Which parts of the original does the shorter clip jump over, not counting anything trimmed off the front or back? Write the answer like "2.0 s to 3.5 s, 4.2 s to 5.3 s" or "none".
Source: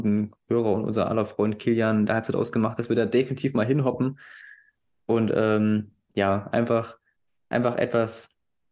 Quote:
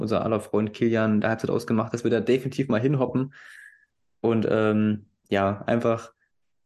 none